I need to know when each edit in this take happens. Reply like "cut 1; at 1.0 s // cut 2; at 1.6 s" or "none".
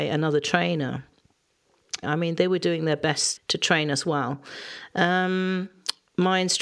cut 1; at 2.0 s // cut 2; at 3.4 s